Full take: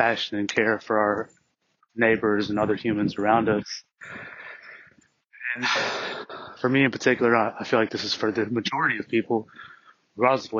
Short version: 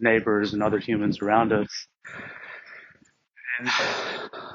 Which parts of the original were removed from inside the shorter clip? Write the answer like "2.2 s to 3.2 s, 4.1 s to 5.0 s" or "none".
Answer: none

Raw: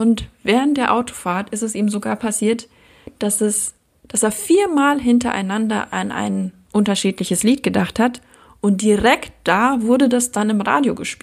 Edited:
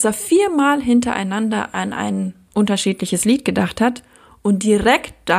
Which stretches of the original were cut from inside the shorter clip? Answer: none

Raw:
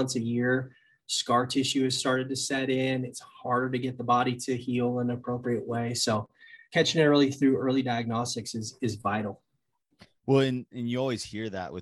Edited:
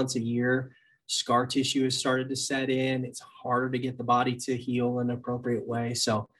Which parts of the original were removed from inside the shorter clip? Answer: none

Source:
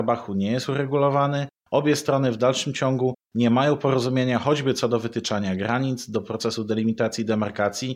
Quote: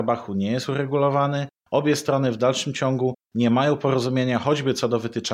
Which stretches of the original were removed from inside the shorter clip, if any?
none

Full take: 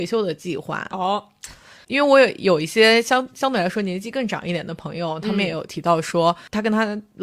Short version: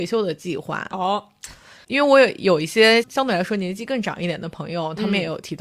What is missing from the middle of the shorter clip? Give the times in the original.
3.0 s to 3.3 s

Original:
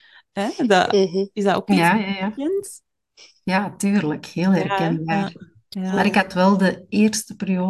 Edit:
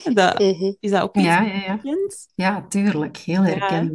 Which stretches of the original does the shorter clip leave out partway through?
2.8 s to 3.4 s

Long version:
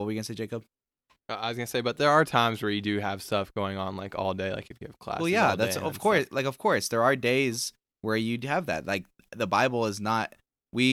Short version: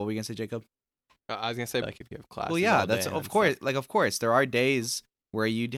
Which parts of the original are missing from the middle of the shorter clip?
1.8 s to 4.5 s

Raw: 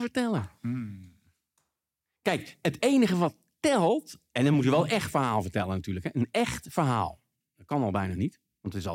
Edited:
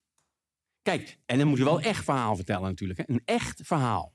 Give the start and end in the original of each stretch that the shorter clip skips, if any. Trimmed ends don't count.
2.6 s to 4.3 s

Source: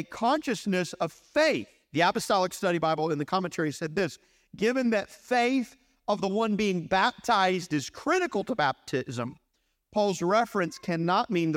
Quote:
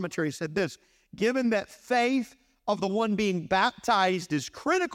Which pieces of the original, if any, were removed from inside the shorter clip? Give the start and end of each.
none

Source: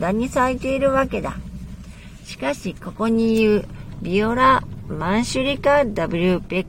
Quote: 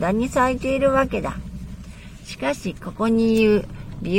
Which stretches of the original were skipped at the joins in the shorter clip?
none

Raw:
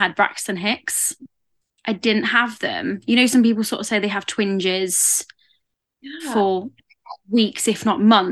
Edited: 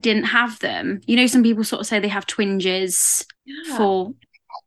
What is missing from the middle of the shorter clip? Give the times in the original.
5.3 s to 5.9 s

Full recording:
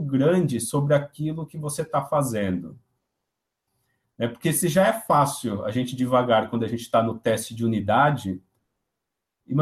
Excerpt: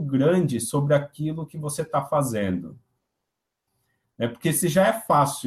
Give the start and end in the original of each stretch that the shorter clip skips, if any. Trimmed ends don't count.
none

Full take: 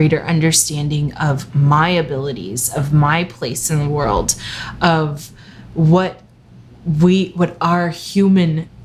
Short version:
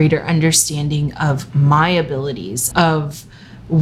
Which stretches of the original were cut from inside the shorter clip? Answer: 2.7 s to 4.8 s

